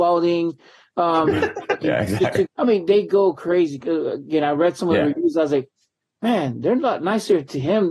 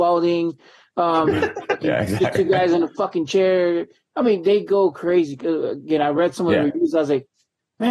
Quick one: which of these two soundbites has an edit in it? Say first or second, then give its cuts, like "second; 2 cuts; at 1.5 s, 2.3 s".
first; 1 cut; at 2.4 s